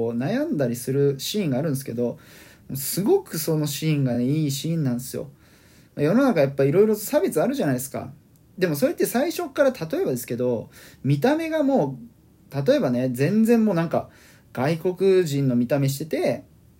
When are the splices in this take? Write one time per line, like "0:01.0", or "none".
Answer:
none